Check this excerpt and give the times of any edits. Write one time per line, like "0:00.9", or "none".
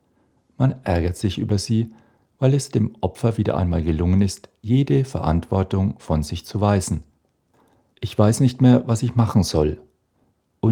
0:07.9